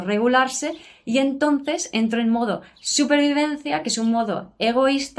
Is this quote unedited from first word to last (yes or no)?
yes